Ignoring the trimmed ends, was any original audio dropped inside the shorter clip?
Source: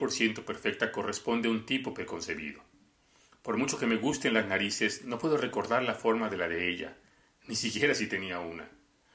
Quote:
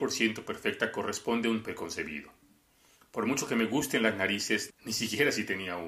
yes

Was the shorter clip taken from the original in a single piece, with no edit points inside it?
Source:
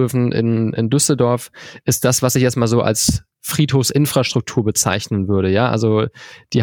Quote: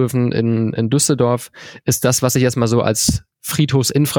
yes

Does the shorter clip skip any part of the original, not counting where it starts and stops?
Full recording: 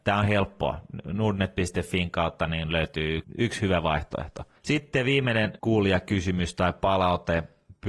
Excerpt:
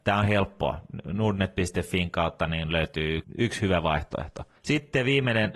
no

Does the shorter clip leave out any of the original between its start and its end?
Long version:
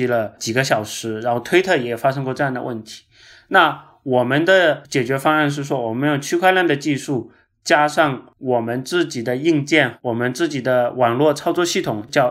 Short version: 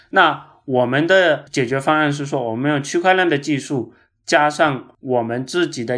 no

